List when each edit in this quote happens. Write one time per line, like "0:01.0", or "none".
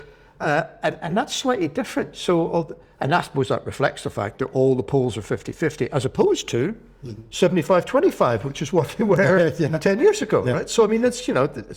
none